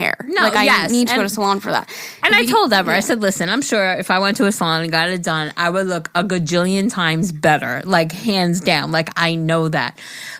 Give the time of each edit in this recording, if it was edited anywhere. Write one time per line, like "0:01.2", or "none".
none